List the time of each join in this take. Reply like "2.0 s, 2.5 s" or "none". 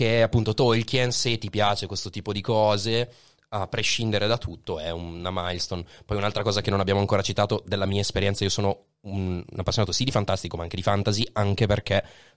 none